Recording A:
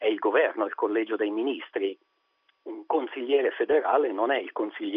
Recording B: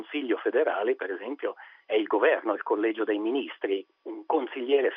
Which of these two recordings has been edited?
B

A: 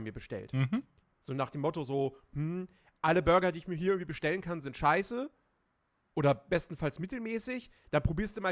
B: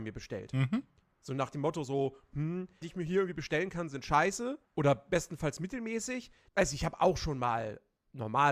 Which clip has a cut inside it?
B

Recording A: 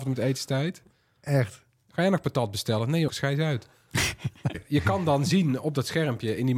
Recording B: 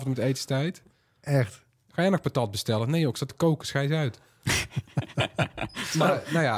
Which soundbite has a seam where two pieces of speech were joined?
A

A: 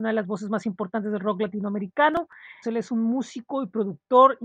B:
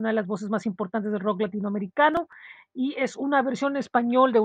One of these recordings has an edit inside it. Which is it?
A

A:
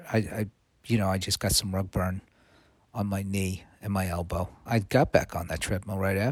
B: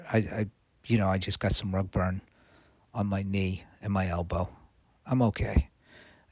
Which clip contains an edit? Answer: A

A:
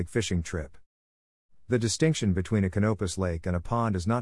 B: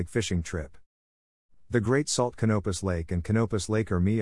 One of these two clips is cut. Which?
B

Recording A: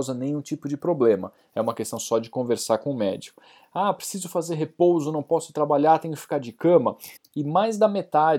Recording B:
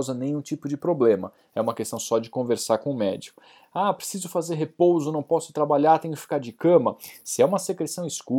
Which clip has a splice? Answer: A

